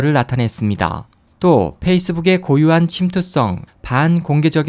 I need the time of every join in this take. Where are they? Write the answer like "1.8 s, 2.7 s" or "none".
1.3 s, 3.7 s